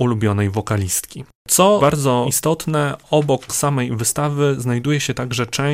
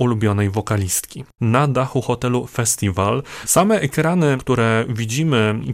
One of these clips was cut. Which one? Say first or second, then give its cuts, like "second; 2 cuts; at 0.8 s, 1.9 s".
second; 2 cuts; at 1.4 s, 3.4 s